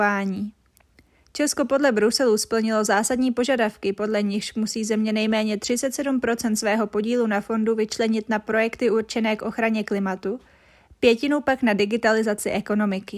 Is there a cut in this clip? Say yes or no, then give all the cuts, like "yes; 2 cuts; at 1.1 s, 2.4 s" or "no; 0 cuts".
no; 0 cuts